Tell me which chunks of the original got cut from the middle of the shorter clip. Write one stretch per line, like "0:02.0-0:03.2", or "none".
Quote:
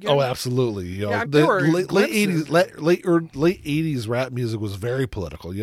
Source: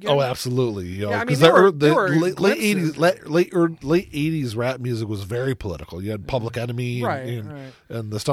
0:01.2-0:01.7